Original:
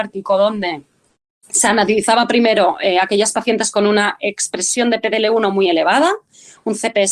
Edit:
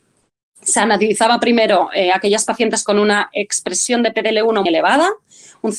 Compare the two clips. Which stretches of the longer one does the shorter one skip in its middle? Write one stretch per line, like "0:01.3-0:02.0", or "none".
0:05.5-0:05.7